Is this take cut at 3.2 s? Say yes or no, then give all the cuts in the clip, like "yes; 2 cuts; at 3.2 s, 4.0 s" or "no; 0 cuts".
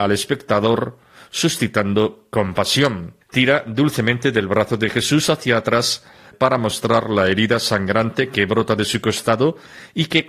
yes; 1 cut; at 3.2 s